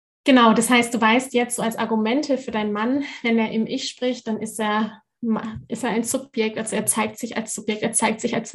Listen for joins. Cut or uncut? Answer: uncut